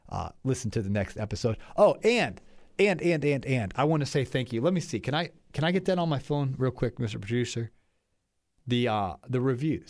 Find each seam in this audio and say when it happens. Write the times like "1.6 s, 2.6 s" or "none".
none